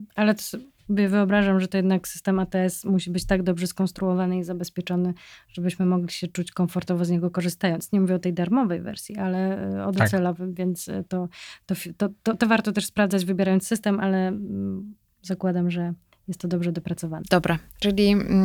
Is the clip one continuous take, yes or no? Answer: yes